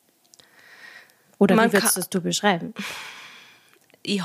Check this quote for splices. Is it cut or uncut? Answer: uncut